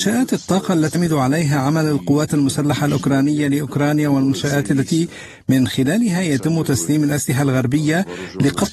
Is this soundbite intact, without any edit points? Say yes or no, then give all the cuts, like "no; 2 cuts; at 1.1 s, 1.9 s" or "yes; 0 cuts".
no; 1 cut; at 0.9 s